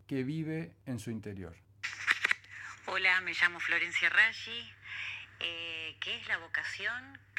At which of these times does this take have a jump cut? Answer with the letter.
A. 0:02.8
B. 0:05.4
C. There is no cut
C